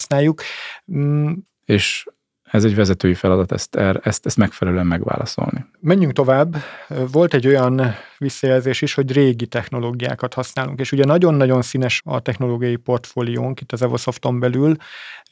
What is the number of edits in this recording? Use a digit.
3